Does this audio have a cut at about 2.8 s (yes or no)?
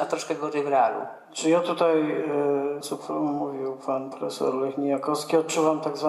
yes